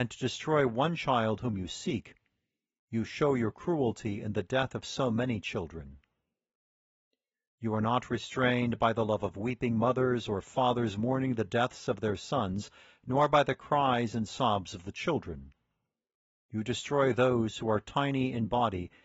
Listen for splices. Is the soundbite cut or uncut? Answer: uncut